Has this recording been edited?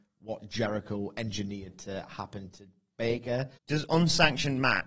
yes; 1 cut; at 3.6 s

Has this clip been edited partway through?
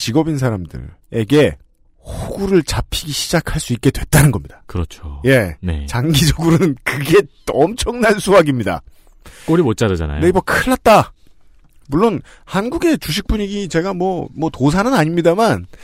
no; 0 cuts

